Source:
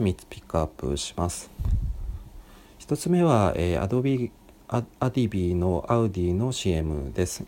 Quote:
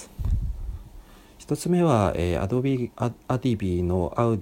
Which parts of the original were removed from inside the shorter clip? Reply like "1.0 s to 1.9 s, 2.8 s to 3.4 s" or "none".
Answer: 4.3 s to 4.6 s